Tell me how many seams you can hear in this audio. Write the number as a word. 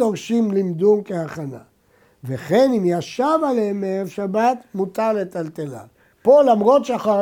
one